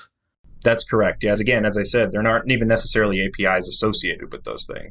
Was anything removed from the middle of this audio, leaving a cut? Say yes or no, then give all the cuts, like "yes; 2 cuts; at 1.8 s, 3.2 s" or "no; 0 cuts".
yes; 1 cut; at 1.4 s